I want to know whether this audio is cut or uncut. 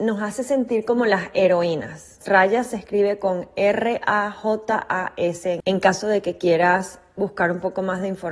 cut